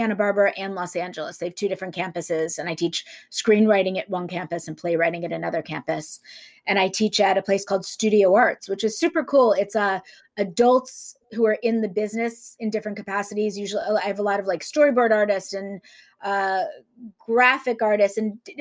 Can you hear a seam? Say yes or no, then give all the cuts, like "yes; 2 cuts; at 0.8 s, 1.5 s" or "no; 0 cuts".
no; 0 cuts